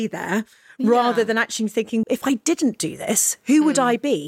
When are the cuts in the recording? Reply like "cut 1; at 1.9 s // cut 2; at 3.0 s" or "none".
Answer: cut 1; at 2.0 s